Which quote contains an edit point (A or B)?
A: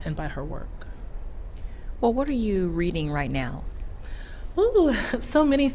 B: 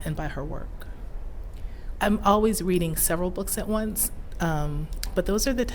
B